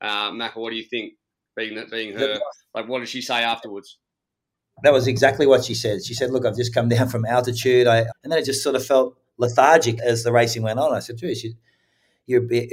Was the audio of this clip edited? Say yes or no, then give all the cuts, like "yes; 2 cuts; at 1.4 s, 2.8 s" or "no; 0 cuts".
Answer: yes; 2 cuts; at 8.1 s, 10.0 s